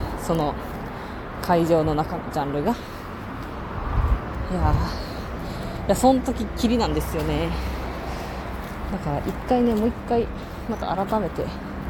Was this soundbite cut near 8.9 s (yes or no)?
no